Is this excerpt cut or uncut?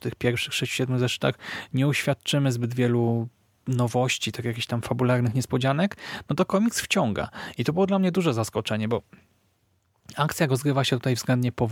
uncut